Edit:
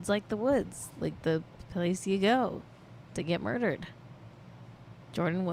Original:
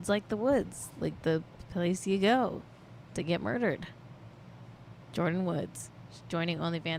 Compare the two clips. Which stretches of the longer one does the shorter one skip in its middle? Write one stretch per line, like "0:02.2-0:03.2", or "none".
none